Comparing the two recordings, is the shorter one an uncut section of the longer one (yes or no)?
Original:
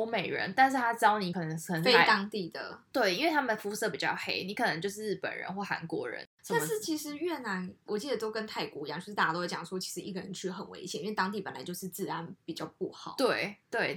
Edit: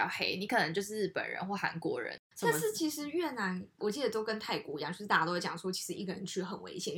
yes